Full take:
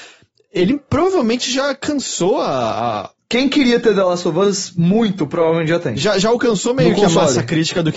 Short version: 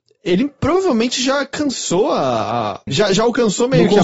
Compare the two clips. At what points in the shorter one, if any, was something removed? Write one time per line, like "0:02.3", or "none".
0:02.9